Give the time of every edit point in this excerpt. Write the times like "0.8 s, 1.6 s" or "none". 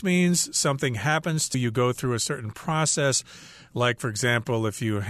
1.5 s